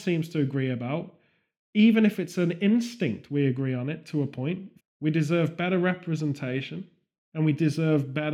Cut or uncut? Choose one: cut